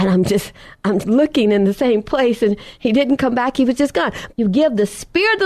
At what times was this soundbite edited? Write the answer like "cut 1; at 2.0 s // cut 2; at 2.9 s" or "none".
cut 1; at 1.0 s // cut 2; at 4.3 s